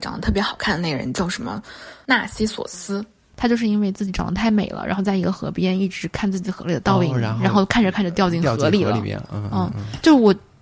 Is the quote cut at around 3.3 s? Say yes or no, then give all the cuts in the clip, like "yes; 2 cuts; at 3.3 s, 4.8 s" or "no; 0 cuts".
no; 0 cuts